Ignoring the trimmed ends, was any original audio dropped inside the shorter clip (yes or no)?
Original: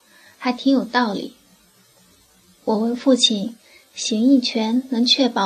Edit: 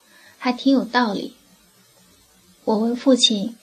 no